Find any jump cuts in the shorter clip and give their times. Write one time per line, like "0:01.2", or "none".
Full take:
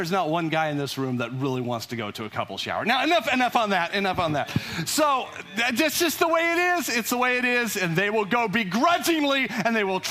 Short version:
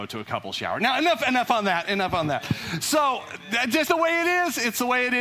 0:03.9